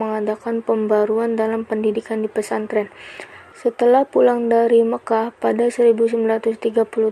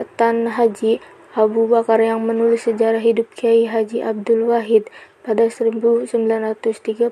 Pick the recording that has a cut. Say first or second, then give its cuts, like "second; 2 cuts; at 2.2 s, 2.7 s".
first; 1 cut; at 3.5 s